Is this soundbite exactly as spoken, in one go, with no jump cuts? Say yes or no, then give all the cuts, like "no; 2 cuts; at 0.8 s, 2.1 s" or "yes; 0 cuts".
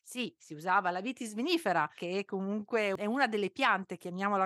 no; 1 cut; at 2.0 s